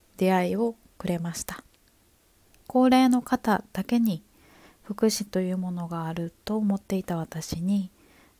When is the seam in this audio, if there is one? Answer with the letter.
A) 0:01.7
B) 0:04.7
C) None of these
C